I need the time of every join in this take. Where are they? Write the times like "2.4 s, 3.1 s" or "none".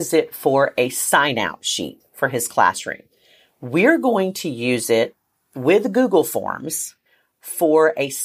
none